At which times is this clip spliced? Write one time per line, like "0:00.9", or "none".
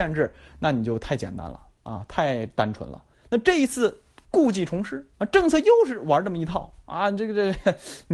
0:03.1
0:05.1